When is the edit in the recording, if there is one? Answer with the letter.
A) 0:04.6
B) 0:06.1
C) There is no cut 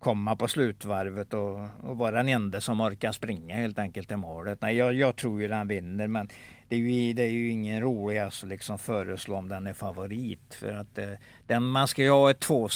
C